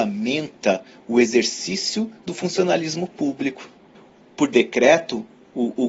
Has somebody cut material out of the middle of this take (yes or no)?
no